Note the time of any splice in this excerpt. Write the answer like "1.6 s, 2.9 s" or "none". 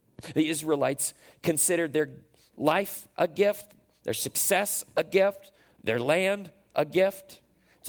none